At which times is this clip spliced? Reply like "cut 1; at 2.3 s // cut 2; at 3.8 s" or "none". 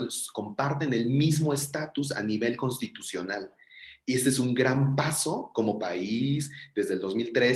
none